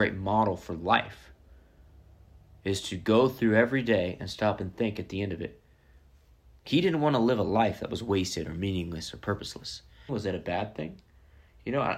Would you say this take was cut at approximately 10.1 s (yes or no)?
yes